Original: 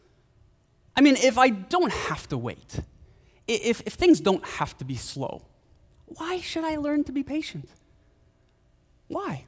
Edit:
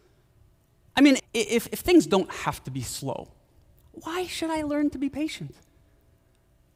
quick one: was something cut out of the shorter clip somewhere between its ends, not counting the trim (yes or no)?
yes